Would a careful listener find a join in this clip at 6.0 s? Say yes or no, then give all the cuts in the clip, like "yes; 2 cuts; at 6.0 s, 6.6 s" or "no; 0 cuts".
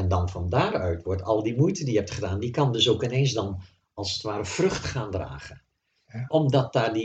no; 0 cuts